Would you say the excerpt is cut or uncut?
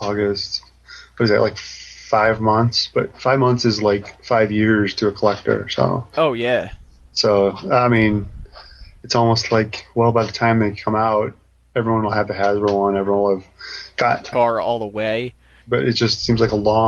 cut